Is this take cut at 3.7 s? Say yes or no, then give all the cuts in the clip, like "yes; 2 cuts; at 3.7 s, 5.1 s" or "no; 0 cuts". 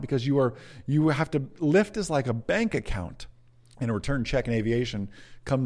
yes; 1 cut; at 3.7 s